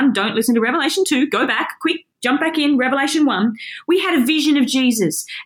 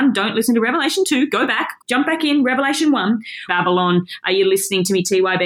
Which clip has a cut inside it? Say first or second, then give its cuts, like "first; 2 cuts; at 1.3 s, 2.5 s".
second; 2 cuts; at 1.8 s, 3.5 s